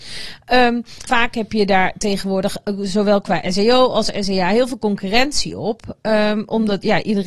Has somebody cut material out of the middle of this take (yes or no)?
yes